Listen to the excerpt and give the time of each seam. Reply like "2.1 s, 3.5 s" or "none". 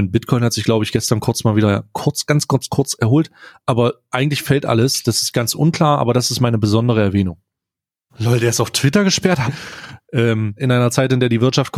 8.1 s, 9.5 s, 10.6 s